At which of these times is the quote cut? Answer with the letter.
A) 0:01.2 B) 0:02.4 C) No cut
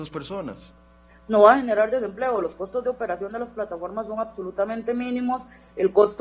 C